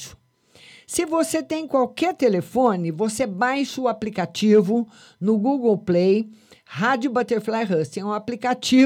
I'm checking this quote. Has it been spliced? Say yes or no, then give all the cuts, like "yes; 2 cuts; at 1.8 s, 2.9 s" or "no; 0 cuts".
no; 0 cuts